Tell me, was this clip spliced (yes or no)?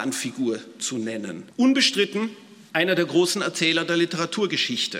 yes